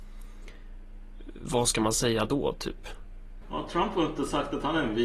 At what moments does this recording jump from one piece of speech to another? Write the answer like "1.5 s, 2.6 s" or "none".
3.4 s